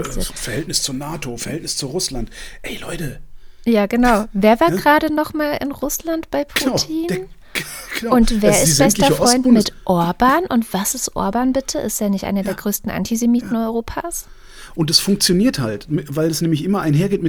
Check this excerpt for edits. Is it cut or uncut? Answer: uncut